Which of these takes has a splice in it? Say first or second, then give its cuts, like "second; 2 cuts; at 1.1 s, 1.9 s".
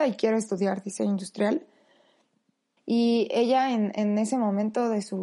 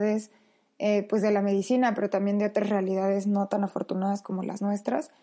first; 1 cut; at 2.8 s